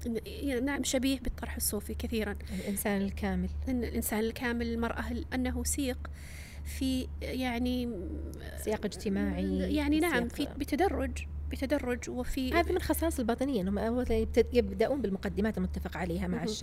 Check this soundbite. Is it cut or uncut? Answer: cut